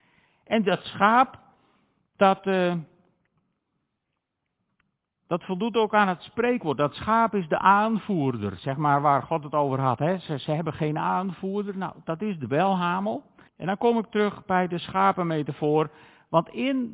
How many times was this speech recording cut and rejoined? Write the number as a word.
one